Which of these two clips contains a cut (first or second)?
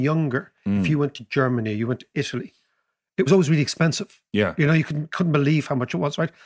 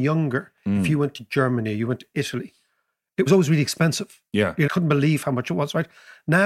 second